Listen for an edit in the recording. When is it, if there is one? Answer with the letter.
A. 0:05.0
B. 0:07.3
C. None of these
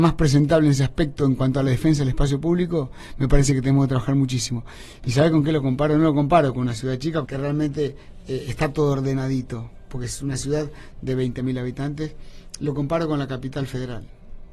B